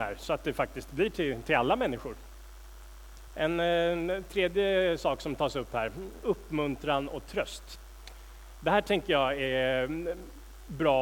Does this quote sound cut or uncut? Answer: cut